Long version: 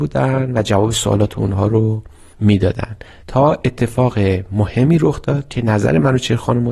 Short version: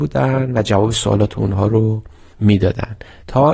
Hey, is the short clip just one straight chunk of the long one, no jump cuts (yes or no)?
yes